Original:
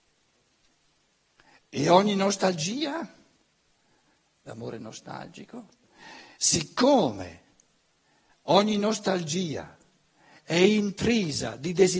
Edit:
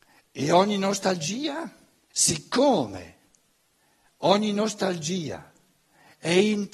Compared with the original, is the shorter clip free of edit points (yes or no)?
no